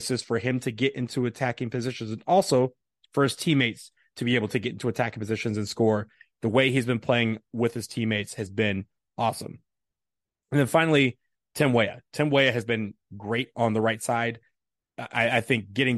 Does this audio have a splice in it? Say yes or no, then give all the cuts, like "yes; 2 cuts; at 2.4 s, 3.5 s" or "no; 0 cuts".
no; 0 cuts